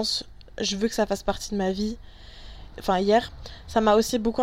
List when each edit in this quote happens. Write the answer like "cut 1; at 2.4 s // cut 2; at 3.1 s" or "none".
cut 1; at 2.7 s